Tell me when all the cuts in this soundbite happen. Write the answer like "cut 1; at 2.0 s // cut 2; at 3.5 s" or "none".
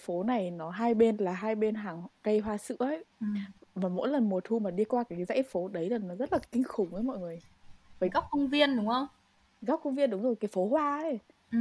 cut 1; at 3.1 s